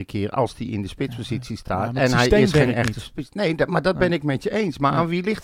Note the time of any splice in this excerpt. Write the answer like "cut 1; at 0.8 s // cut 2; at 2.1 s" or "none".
none